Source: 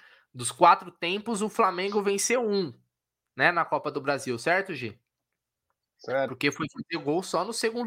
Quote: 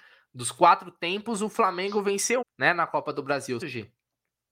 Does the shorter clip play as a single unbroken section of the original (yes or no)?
no